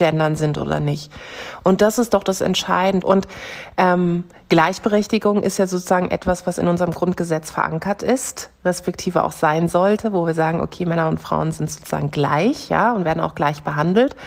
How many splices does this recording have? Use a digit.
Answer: 1